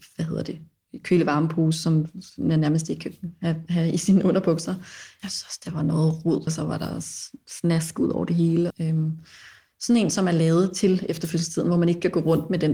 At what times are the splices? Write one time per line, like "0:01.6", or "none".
0:05.2
0:06.5
0:08.7